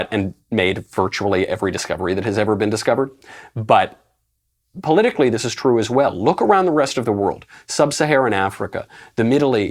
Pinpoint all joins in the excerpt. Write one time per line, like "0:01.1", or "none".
none